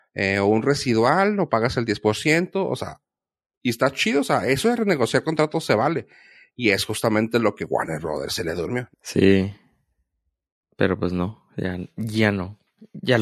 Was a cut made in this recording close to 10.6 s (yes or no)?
no